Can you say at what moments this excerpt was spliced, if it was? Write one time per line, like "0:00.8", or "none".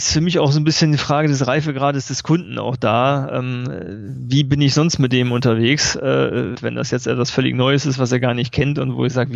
0:06.6

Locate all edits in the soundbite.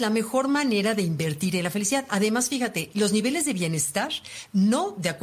0:02.9

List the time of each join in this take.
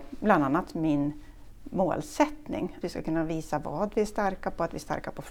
0:02.8

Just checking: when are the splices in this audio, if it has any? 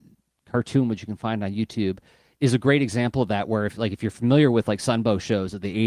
none

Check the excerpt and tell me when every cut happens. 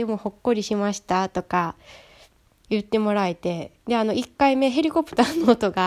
0:03.8

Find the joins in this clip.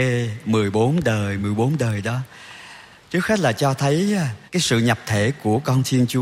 0:01.4
0:04.5

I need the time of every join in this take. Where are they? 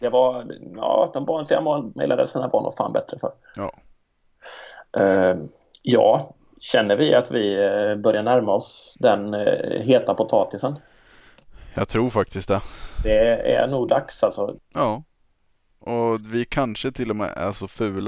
0:14.6

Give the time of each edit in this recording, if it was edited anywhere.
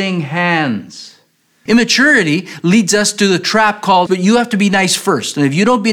0:01.7
0:04.1

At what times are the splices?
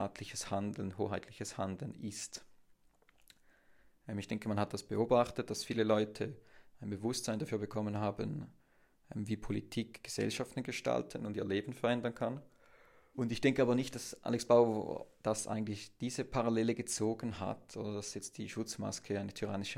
0:13.1

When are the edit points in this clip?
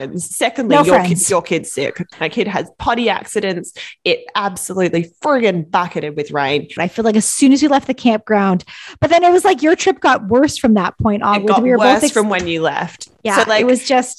0:02.1
0:06.8

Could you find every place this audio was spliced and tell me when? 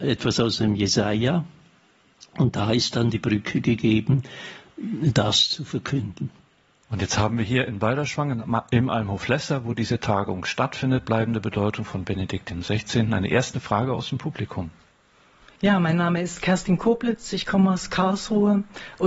0:06.8

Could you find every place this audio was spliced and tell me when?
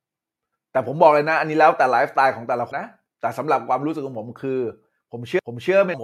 0:02.7

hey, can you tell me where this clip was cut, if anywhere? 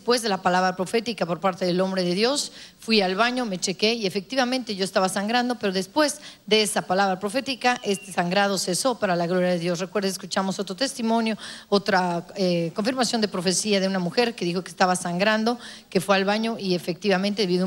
none

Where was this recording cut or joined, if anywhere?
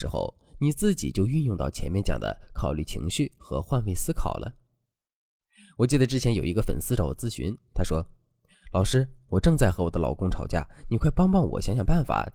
none

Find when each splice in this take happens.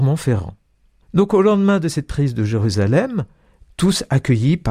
0:01.0
0:03.7

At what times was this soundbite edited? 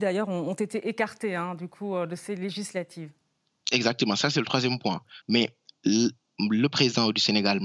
0:05.2

